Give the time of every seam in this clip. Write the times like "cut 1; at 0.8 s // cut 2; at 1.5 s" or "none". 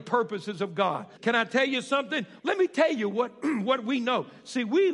cut 1; at 1.2 s // cut 2; at 2.4 s